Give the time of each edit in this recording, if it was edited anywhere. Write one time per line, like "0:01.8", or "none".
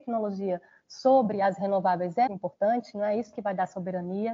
0:02.3